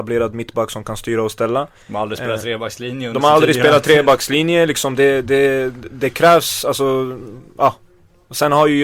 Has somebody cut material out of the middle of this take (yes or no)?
no